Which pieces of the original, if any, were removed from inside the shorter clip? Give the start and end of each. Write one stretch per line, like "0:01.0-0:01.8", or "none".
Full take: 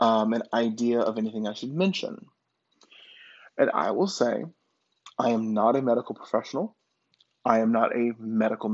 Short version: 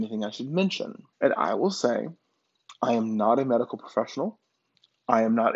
0:02.4-0:03.5